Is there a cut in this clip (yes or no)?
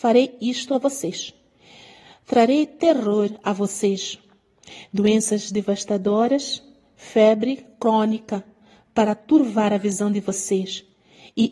no